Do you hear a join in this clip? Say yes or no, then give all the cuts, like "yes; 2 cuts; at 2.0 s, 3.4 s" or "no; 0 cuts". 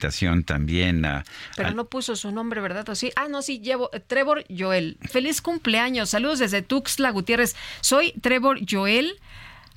yes; 1 cut; at 5.1 s